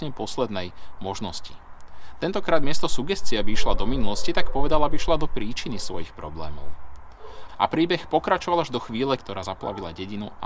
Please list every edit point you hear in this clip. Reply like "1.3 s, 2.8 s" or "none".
7.5 s, 9.2 s